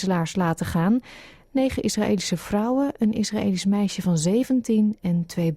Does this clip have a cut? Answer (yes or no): no